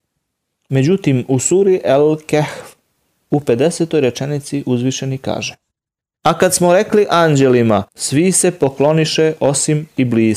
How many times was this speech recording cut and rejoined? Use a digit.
1